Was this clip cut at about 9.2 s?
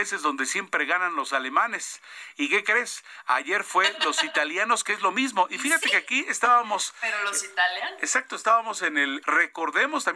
yes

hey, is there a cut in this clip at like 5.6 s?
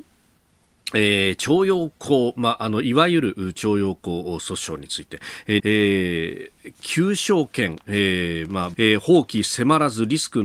yes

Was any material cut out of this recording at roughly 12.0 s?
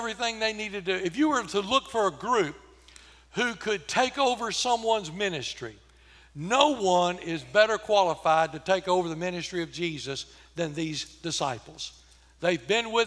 no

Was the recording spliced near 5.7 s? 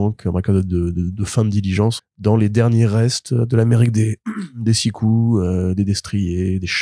no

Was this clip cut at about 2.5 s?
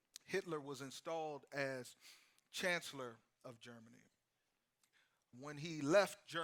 no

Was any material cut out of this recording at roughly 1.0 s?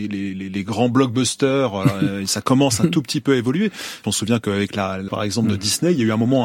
no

